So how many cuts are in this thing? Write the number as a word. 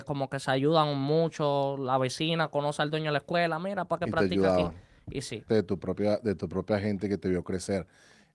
one